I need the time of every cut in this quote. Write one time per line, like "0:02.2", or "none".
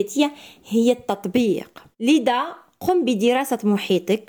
0:01.9